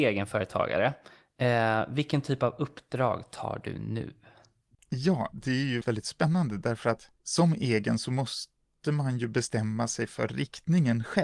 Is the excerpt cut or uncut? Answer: cut